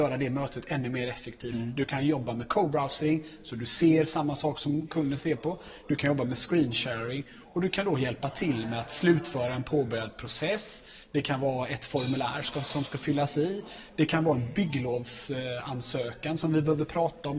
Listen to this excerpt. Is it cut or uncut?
uncut